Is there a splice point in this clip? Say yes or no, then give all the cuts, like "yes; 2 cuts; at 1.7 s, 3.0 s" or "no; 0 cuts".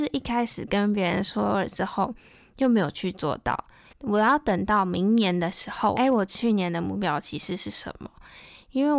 yes; 2 cuts; at 3.9 s, 6.0 s